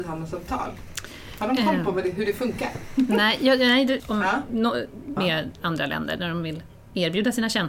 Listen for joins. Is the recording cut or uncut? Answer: cut